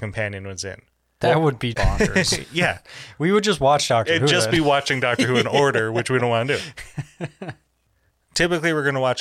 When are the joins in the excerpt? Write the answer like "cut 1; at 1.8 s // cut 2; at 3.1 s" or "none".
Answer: cut 1; at 1.7 s